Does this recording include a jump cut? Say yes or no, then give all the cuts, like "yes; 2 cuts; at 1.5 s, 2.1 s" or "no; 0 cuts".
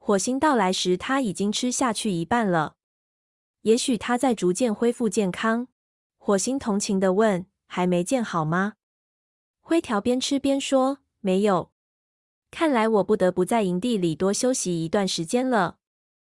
yes; 1 cut; at 6.1 s